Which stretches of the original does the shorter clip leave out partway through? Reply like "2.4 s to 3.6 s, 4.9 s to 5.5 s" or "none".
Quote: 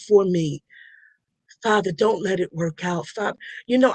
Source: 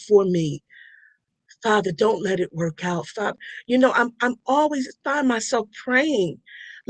none